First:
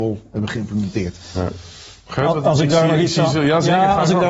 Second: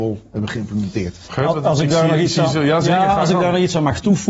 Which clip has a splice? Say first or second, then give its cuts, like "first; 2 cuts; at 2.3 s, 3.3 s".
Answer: second; 1 cut; at 1.3 s